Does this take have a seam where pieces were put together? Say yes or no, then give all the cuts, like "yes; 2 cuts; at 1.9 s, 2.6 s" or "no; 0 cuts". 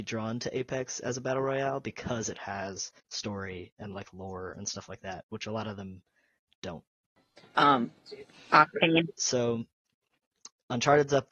yes; 3 cuts; at 3.0 s, 7.5 s, 9.2 s